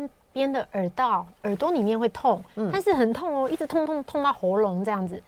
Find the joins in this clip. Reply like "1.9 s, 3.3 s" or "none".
3.9 s